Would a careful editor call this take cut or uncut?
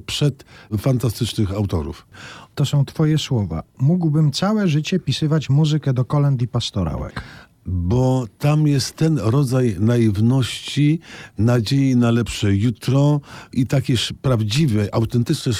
uncut